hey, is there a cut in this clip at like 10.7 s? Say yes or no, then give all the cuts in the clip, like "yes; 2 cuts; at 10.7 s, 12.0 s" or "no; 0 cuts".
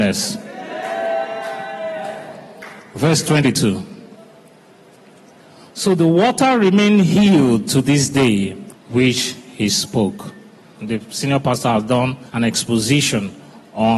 yes; 3 cuts; at 8.7 s, 10.7 s, 12.3 s